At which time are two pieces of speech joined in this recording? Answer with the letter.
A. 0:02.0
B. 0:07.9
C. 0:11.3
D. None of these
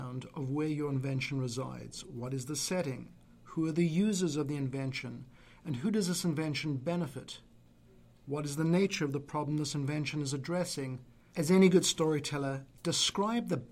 C